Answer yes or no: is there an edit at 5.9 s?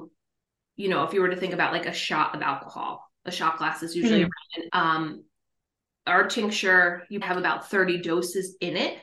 no